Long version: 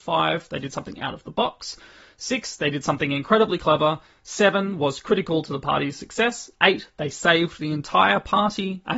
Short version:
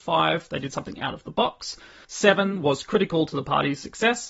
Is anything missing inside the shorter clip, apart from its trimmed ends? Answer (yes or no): yes